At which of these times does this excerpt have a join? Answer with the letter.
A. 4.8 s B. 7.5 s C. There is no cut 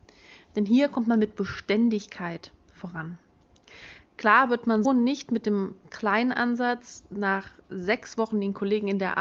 A